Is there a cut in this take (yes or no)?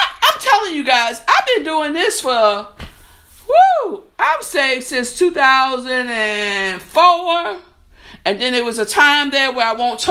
no